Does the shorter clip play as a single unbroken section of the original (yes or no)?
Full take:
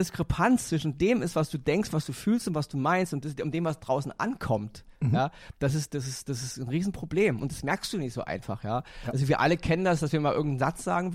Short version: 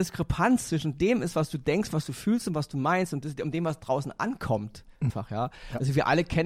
no